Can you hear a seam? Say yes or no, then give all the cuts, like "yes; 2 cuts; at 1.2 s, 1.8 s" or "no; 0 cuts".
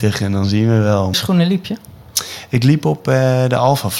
yes; 1 cut; at 1.1 s